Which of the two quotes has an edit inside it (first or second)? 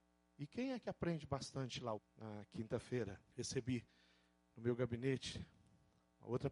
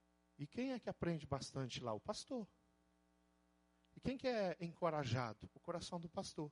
first